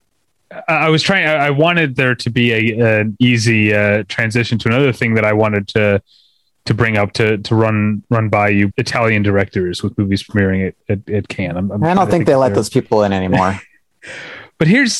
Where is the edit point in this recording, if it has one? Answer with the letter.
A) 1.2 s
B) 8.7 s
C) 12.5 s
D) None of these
B